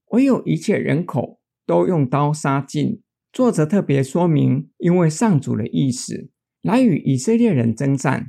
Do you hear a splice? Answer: yes; 2 cuts; at 4.7 s, 6.6 s

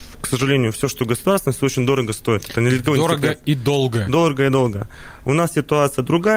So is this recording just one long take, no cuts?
yes; 0 cuts

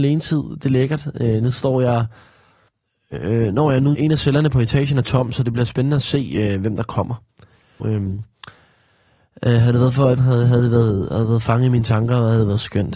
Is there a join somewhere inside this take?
yes; 3 cuts; at 3.9 s, 7.8 s, 10.2 s

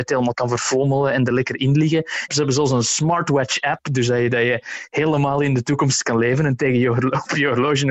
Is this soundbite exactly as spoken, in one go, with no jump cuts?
no; 1 cut; at 2.3 s

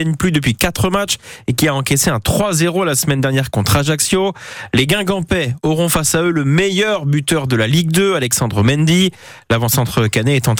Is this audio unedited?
yes; 0 cuts

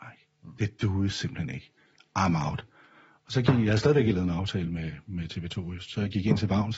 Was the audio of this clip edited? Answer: no; 0 cuts

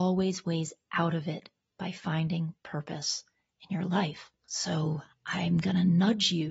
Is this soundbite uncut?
no; 1 cut; at 4.4 s

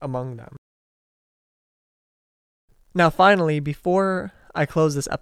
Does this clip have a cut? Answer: no; 0 cuts

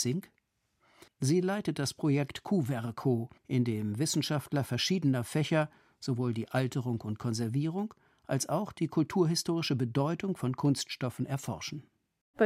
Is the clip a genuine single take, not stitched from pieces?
no; 2 cuts; at 1.1 s, 3.4 s

